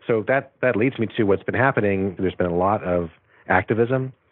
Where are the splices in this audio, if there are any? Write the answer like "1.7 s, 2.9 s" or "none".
2.2 s